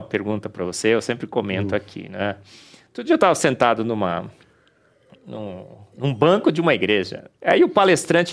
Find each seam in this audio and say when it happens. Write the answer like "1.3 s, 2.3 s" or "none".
7.3 s